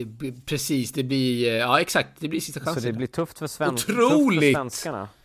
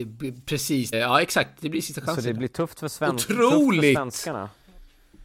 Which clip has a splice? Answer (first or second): second